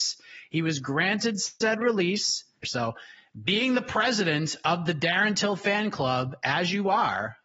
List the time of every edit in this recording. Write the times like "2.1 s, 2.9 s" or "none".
2.6 s